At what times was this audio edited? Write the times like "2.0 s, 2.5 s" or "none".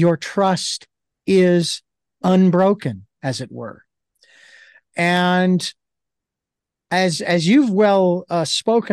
none